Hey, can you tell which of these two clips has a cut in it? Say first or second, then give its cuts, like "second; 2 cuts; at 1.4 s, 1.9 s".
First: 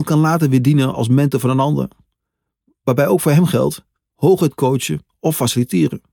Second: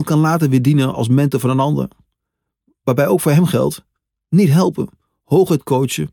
first; 1 cut; at 4.1 s